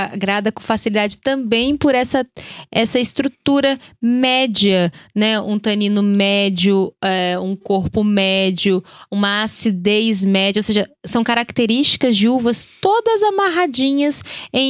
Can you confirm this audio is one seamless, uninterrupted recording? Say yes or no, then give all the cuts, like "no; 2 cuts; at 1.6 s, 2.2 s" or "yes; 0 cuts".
yes; 0 cuts